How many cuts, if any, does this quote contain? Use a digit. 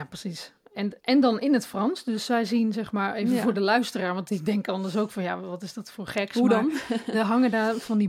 1